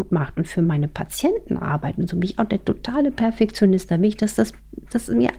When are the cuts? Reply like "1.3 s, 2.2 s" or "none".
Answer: none